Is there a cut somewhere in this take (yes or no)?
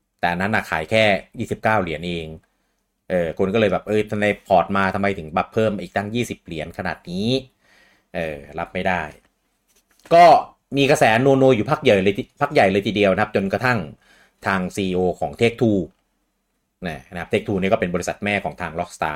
no